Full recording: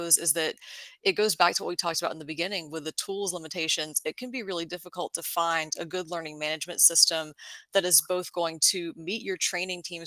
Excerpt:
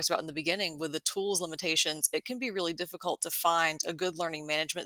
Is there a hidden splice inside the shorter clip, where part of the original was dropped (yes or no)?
no